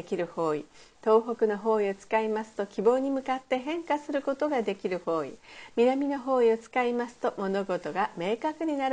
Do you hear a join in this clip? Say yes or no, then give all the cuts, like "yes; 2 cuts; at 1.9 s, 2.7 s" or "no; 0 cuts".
no; 0 cuts